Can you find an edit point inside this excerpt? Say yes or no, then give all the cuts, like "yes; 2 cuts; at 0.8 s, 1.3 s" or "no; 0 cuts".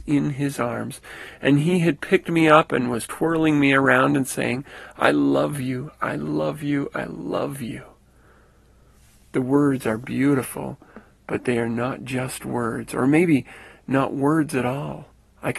no; 0 cuts